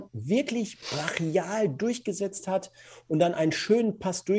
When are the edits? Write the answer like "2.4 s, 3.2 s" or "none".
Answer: none